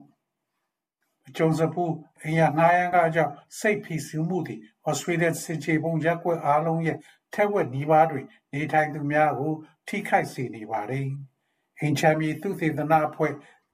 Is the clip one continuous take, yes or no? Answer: yes